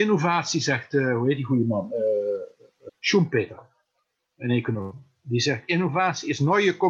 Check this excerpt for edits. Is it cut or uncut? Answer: cut